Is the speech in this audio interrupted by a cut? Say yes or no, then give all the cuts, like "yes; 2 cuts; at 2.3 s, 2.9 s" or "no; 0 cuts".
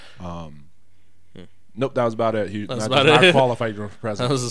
no; 0 cuts